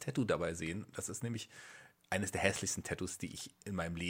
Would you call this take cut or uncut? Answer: uncut